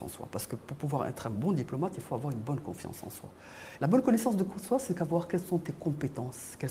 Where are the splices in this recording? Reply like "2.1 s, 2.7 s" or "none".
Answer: 3.8 s

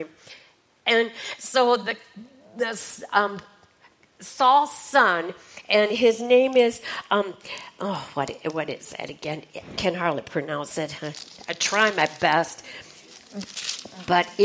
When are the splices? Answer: none

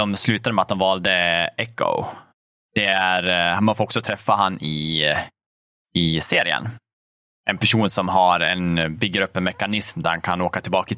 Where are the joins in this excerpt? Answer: none

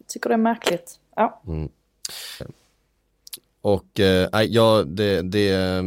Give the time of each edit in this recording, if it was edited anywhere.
2.4 s

